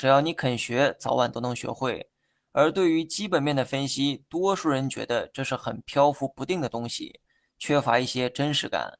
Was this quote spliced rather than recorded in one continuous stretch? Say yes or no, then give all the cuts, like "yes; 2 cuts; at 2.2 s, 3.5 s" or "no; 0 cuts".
no; 0 cuts